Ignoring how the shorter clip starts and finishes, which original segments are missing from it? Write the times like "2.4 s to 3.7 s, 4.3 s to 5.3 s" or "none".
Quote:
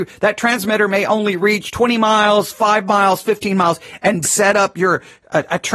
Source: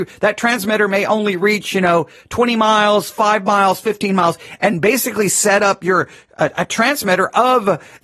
1.7 s to 2.2 s, 4.8 s to 5.3 s